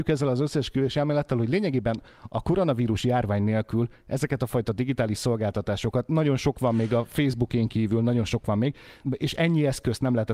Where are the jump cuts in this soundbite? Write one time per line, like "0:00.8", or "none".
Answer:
0:09.0